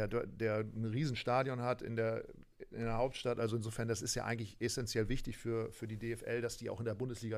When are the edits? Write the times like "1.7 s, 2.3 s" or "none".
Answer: none